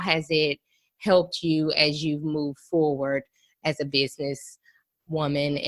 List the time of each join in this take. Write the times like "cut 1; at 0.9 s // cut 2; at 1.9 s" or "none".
none